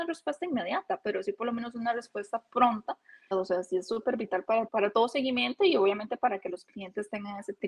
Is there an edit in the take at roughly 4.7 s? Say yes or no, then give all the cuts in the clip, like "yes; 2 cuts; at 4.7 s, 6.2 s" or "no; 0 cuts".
yes; 2 cuts; at 3.3 s, 4.7 s